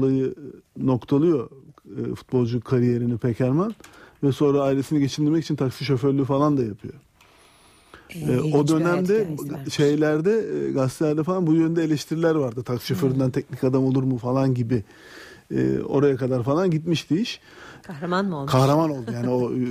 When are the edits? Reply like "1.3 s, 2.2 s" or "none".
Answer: 17.8 s